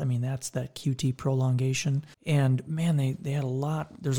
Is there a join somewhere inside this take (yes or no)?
yes